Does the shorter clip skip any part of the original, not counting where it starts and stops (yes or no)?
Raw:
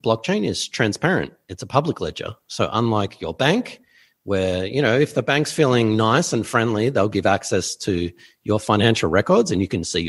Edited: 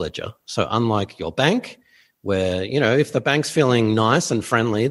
no